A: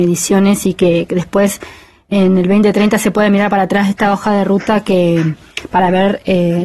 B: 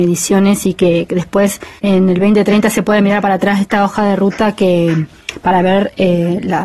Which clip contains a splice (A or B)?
B